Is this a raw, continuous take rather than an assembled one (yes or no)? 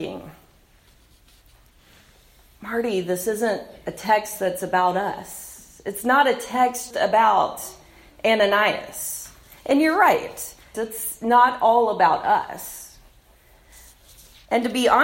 no